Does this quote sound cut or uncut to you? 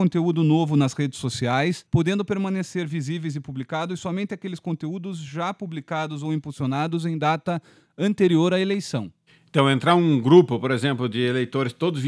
uncut